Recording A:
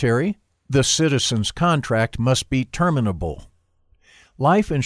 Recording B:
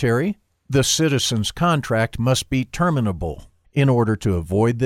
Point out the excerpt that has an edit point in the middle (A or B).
B